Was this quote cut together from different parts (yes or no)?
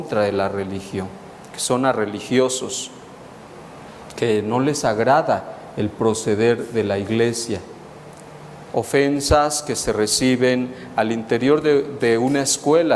yes